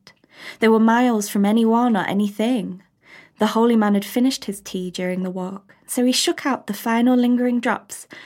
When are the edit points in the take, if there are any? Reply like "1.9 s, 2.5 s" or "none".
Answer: none